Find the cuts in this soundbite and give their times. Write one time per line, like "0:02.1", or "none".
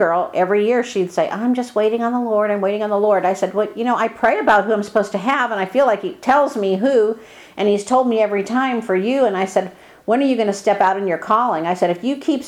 none